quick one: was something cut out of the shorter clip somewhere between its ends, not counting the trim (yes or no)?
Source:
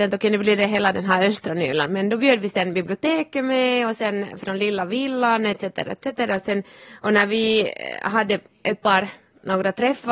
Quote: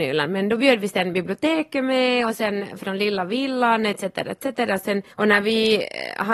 yes